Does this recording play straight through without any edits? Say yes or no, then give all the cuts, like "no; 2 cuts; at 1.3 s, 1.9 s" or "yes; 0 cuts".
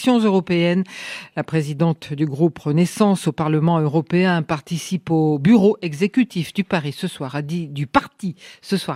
yes; 0 cuts